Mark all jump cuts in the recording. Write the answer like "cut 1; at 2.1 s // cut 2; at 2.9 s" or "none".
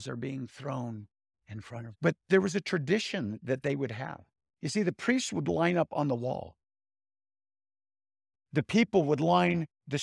cut 1; at 1.9 s